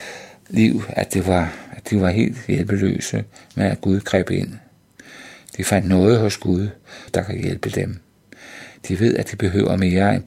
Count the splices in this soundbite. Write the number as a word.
one